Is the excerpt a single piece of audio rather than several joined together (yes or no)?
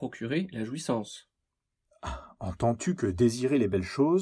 yes